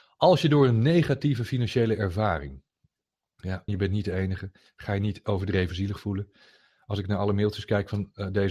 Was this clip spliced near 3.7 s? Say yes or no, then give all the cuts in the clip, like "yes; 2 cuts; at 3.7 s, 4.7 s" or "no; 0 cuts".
yes; 1 cut; at 3.7 s